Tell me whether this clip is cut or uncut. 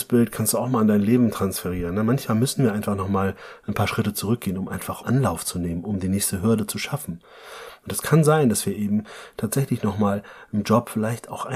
uncut